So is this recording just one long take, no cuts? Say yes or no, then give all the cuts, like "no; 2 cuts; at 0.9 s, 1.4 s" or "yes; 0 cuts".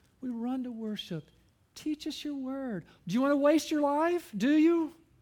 no; 1 cut; at 3.0 s